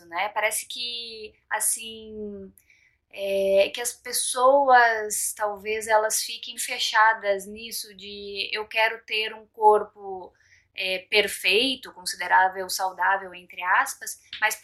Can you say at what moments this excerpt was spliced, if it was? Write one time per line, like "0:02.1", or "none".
0:06.6

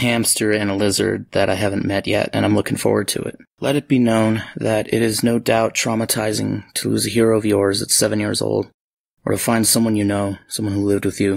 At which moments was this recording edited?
0:03.5

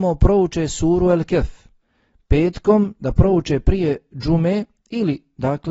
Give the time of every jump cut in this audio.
none

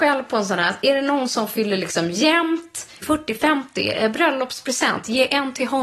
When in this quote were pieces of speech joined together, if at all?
0:03.0

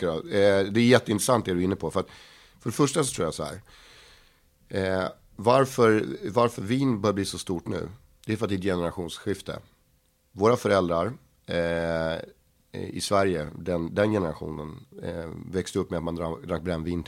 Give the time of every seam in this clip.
none

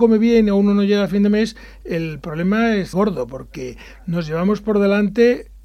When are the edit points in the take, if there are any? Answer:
0:02.9

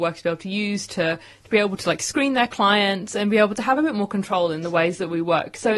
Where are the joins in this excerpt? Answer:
none

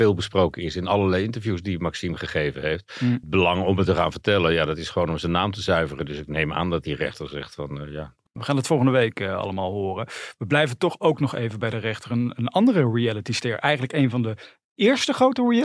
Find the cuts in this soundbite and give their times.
none

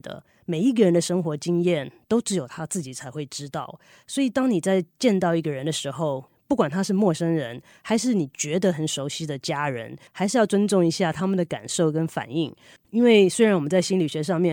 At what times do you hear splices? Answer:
0:10.1
0:12.8

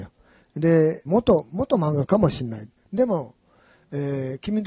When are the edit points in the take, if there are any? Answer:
0:01.0

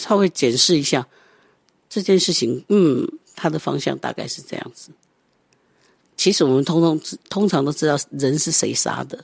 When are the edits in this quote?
0:07.2

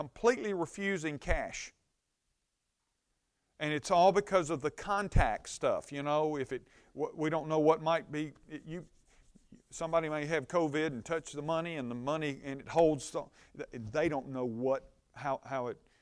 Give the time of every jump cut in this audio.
none

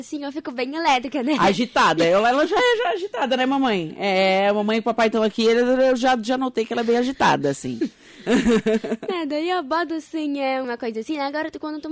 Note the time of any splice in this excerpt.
0:10.6

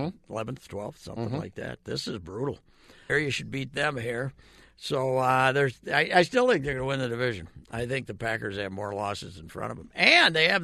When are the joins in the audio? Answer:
0:03.1

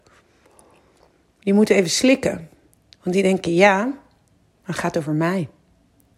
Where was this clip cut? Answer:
none

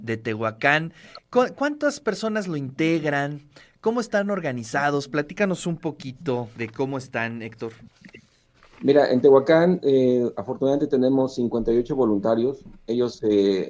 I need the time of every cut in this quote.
0:06.6

